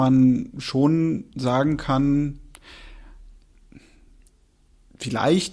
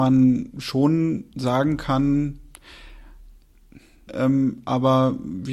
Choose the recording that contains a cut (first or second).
second